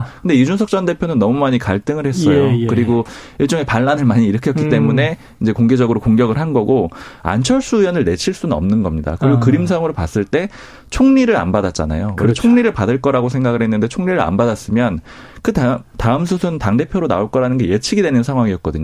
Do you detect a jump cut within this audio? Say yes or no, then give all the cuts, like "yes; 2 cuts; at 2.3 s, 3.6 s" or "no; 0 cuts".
no; 0 cuts